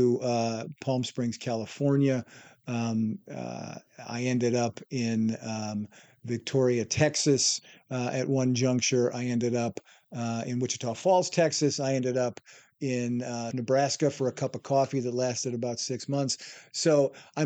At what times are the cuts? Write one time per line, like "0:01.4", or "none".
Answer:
0:13.5